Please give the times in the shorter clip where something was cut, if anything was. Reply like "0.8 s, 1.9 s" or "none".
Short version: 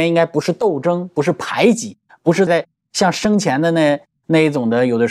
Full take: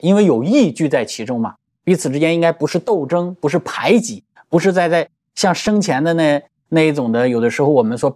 2.5 s